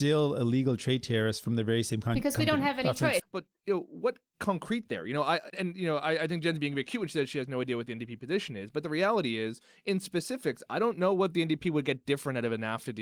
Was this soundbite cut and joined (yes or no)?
yes